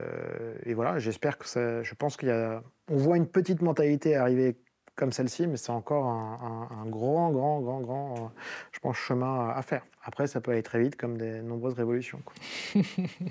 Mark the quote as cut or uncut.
uncut